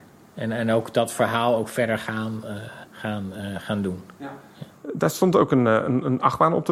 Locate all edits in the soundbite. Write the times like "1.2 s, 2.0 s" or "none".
2.9 s